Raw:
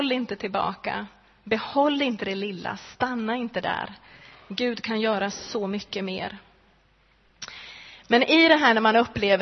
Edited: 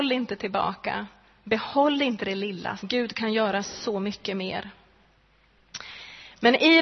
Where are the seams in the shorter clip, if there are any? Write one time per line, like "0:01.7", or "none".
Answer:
0:02.8